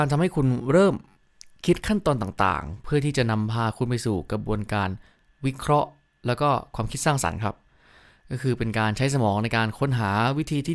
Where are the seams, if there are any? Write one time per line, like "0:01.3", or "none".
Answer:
none